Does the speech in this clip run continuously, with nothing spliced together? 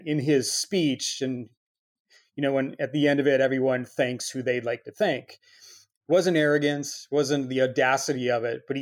yes; 0 cuts

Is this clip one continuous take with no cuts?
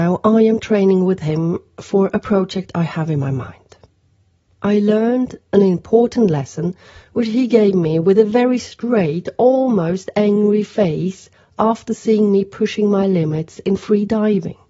yes; 0 cuts

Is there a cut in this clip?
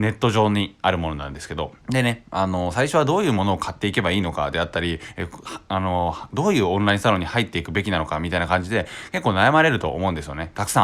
yes; 1 cut; at 1.8 s

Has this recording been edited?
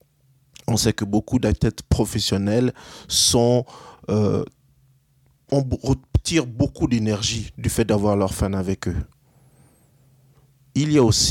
no; 0 cuts

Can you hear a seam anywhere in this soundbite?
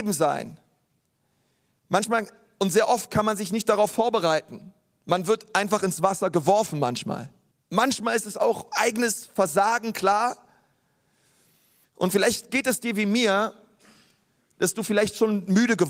yes; 2 cuts; at 7.5 s, 11.8 s

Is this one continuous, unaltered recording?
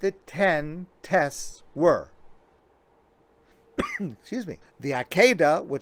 no; 2 cuts; at 3.5 s, 4.6 s

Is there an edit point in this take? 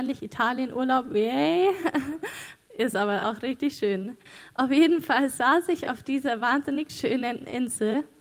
no; 0 cuts

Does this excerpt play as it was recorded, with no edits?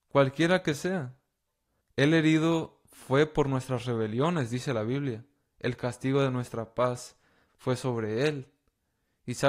no; 2 cuts; at 1.8 s, 5.4 s

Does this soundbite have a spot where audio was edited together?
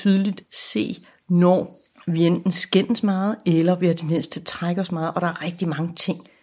no; 0 cuts

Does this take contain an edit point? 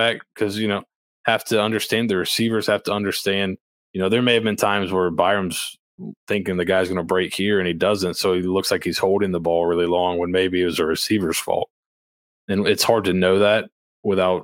no; 0 cuts

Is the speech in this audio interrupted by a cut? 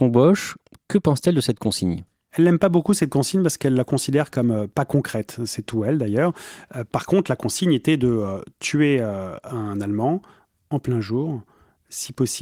no; 0 cuts

